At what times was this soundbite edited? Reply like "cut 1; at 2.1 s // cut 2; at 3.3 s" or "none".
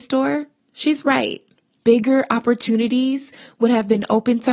cut 1; at 1.7 s